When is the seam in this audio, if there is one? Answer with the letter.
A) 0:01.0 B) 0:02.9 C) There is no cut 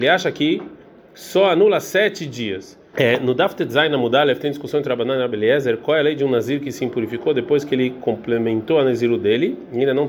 B